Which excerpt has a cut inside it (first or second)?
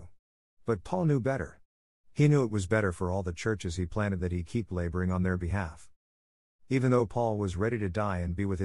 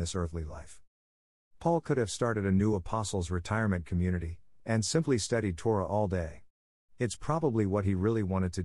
second